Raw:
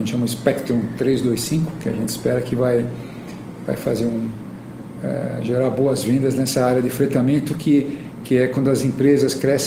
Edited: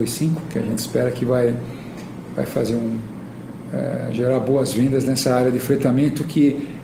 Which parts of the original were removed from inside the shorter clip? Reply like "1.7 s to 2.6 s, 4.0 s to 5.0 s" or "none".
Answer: none